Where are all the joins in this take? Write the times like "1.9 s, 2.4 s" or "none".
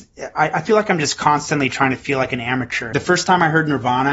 2.9 s